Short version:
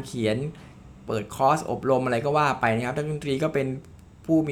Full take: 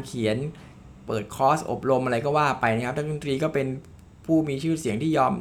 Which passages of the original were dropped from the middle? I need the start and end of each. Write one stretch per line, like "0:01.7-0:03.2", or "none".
none

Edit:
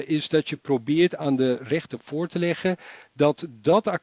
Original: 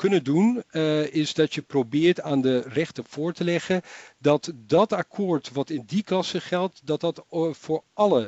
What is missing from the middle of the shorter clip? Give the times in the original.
none

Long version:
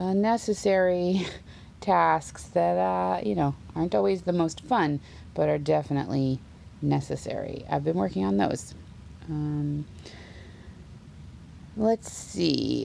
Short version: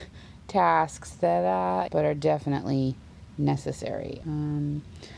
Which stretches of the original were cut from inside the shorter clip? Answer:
0:03.2-0:05.3
0:07.7-0:09.3

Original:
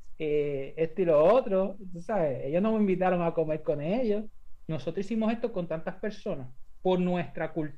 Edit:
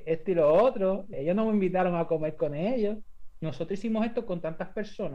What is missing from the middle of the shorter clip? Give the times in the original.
0:01.8-0:02.4

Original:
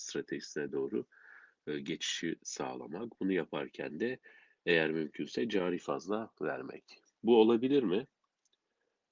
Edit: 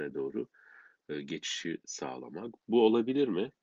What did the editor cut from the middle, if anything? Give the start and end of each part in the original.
0:03.2-0:07.1

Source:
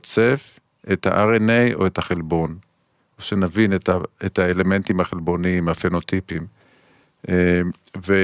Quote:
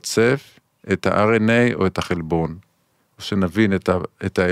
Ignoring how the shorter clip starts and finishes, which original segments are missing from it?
none

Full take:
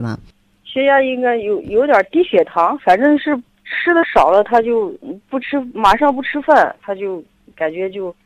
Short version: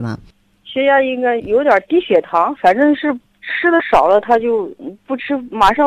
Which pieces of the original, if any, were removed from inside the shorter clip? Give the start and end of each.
0:01.4-0:01.6

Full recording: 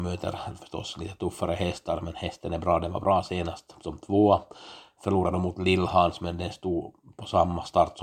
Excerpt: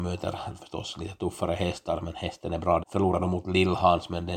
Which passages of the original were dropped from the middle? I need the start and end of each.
0:02.8-0:04.9

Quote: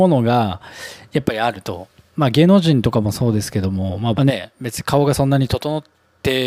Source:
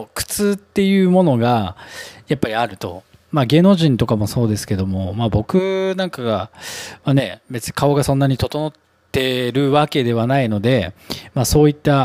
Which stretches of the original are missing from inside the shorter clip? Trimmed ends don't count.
0:05.3-0:07.0

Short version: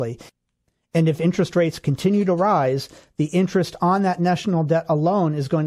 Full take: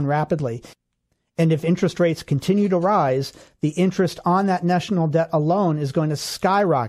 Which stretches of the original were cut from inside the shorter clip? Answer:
none

